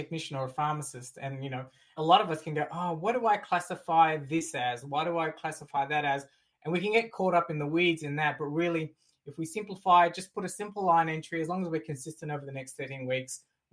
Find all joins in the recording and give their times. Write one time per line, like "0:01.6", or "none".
0:02.0